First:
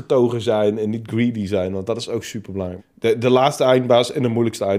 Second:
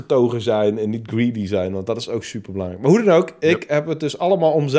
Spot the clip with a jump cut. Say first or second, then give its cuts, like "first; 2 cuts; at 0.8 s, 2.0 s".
first; 1 cut; at 2.8 s